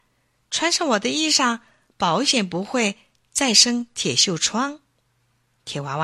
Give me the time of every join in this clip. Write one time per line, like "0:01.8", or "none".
0:05.0